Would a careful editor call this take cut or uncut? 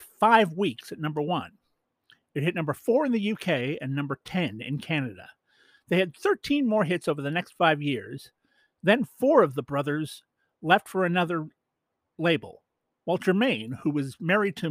uncut